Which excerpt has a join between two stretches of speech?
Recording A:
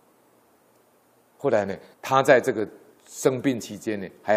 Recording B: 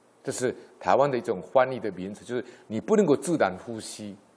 A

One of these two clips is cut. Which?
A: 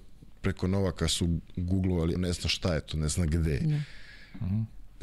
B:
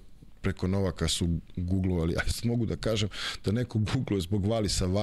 A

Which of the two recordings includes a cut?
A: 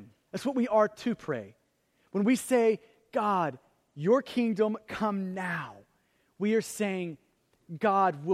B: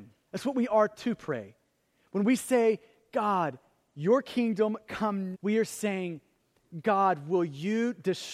B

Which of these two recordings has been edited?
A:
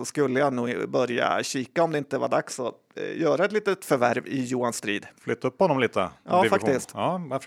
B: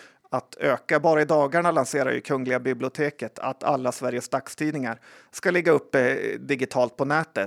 A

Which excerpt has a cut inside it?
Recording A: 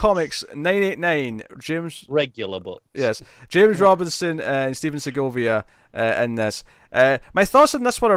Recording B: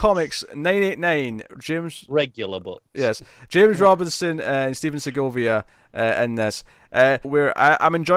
B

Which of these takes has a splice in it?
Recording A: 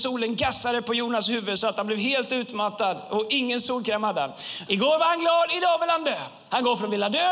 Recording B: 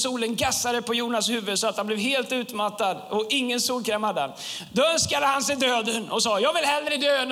A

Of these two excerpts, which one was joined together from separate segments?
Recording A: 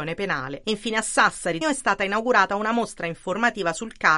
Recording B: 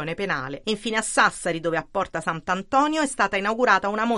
A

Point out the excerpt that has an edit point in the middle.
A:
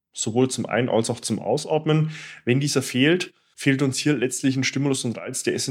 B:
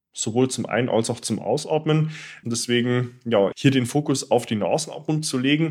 B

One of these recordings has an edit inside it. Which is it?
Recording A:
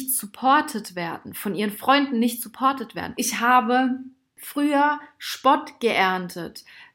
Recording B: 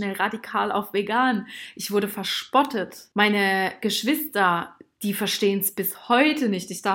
A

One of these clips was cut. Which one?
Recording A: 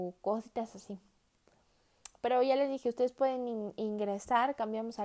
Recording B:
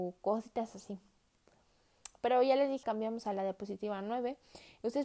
B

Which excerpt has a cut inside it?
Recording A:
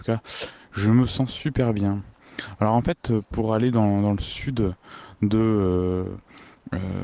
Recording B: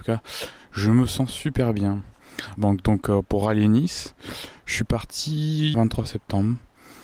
B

